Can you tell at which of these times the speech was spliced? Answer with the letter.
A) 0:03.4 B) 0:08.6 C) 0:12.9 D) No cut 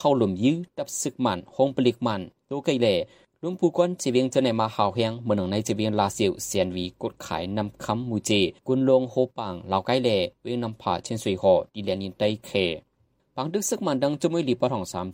B